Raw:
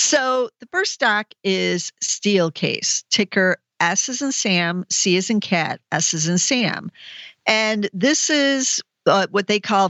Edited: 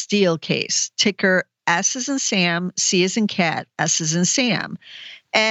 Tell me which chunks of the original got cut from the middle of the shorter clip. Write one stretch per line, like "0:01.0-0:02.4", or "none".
none